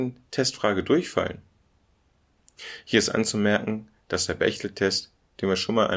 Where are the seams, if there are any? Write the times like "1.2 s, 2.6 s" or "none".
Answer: none